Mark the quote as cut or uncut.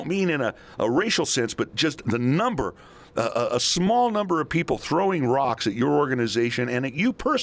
uncut